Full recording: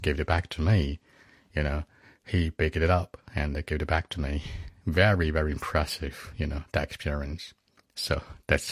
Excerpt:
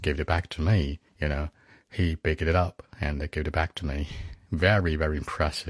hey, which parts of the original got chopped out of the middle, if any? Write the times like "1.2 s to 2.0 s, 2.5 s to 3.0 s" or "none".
1.1 s to 1.4 s